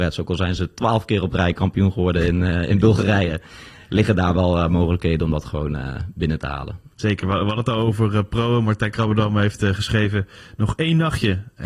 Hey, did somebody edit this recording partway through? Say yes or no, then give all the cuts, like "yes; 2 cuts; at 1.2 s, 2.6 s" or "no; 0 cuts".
no; 0 cuts